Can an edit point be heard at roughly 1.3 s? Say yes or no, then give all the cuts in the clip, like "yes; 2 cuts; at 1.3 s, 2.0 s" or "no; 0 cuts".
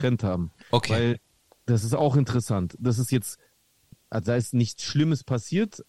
no; 1 cut; at 3.9 s